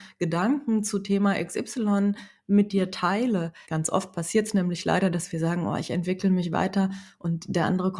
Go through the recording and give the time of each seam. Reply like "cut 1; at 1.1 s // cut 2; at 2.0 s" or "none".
cut 1; at 3.6 s

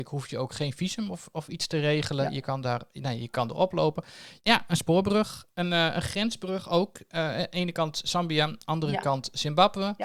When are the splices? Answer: cut 1; at 4.4 s

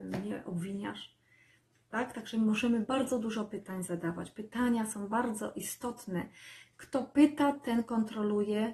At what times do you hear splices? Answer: none

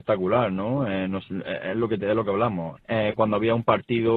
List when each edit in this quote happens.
cut 1; at 2.8 s

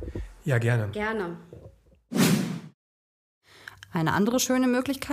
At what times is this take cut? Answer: cut 1; at 0.9 s // cut 2; at 3.8 s

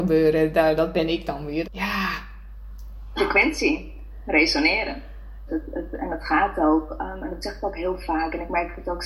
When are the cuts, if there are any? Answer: cut 1; at 1.6 s // cut 2; at 5.5 s

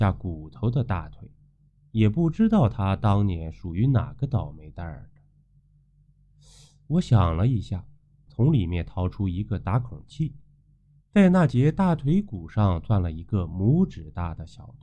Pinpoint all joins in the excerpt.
cut 1; at 8.3 s

